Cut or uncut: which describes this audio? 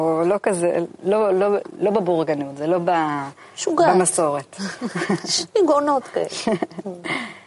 uncut